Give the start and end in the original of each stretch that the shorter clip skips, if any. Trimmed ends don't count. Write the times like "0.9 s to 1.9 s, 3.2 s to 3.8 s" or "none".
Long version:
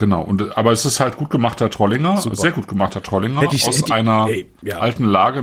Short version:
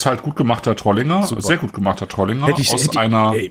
none